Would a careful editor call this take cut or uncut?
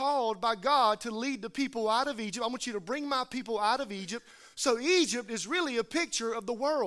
uncut